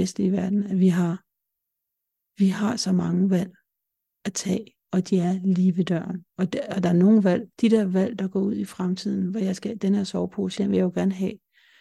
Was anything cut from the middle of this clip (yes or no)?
yes